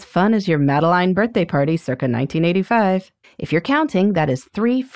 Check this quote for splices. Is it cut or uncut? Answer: cut